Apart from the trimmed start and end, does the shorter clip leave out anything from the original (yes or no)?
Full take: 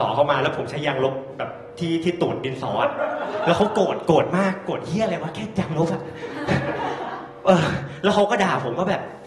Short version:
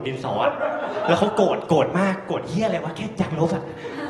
no